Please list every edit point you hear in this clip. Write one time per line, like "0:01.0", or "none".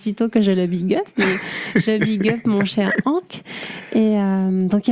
none

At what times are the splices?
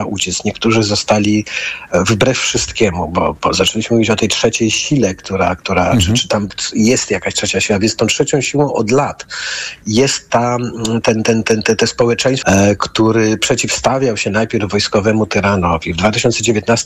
0:12.4

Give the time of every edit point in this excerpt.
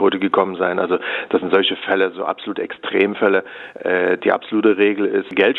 0:04.2

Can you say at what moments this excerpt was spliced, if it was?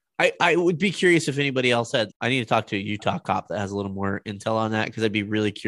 0:02.1

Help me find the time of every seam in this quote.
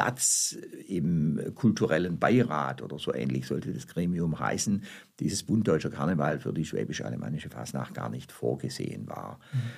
none

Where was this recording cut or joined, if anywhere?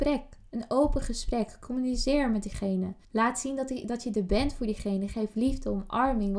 0:03.0

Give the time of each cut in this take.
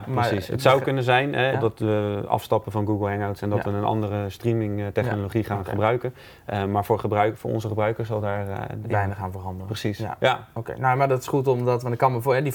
0:01.5

